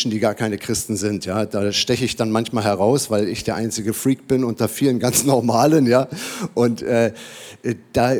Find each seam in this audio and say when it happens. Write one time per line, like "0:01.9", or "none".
none

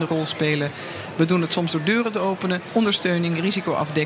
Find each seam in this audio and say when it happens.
0:02.7

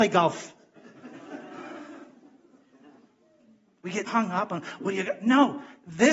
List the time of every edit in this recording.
0:04.1

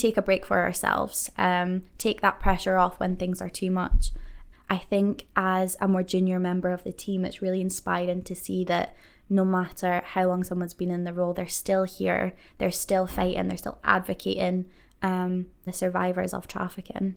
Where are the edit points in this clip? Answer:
0:04.5
0:15.7

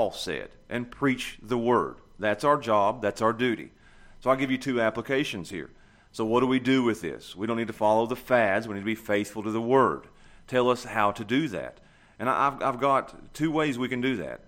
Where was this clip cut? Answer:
none

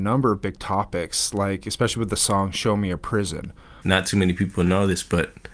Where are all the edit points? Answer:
0:03.8

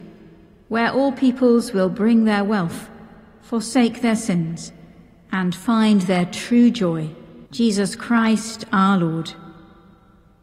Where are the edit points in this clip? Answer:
0:07.5

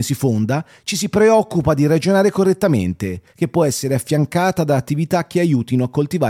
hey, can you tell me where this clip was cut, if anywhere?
0:03.3

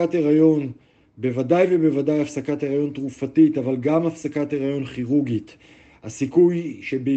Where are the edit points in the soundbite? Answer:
none

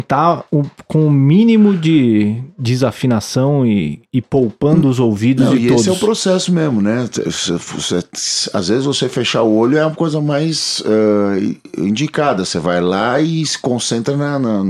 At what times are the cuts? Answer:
none

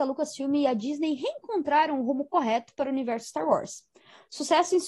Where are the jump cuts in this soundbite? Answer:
none

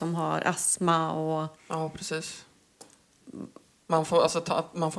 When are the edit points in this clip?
none

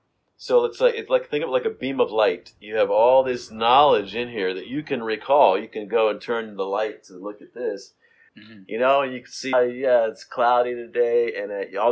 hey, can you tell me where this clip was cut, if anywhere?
0:08.3
0:09.5

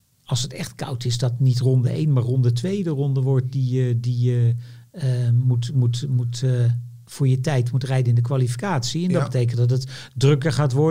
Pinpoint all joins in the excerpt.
none

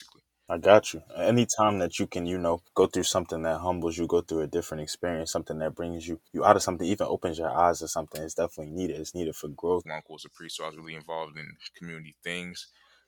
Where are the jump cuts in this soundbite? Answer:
0:09.8

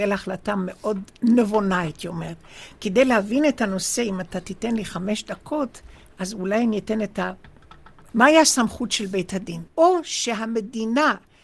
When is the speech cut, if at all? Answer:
0:08.1
0:09.7

